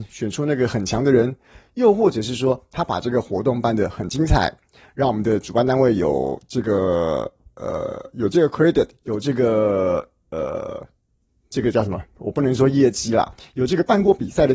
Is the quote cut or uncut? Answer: uncut